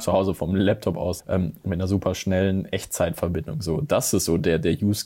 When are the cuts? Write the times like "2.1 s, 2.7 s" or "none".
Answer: 1.2 s